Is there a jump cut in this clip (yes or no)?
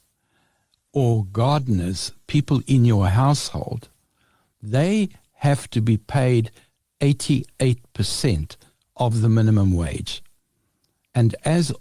no